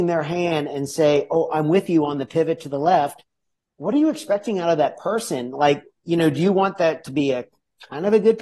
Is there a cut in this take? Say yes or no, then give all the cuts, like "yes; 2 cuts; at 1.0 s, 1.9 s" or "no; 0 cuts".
no; 0 cuts